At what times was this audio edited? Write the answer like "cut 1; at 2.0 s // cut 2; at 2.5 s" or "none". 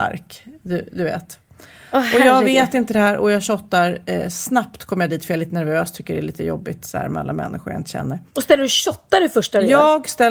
cut 1; at 8.3 s